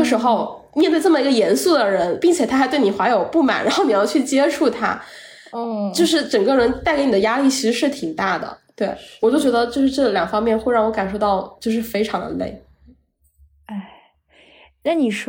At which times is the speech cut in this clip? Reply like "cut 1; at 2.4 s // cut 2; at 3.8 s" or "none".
none